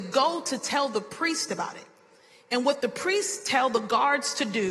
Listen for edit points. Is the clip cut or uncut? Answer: uncut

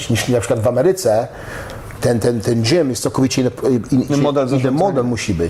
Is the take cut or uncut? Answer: cut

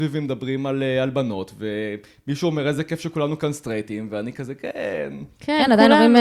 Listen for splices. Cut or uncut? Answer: uncut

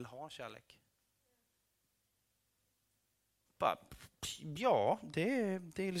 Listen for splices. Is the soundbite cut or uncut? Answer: cut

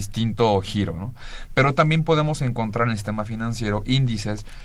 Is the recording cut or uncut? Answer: uncut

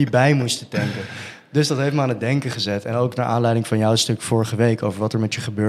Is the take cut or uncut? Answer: uncut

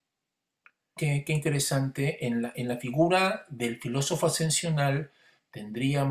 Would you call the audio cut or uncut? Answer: cut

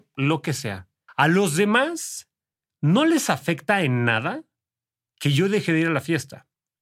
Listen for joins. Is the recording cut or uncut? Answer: cut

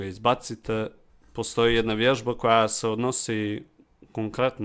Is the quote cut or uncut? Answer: uncut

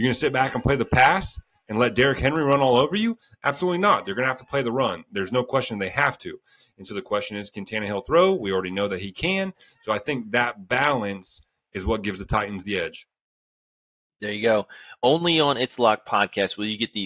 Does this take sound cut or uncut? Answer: uncut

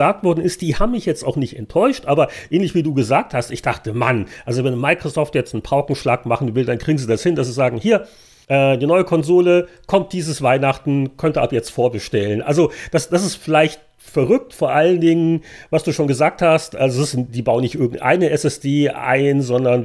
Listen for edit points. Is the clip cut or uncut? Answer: uncut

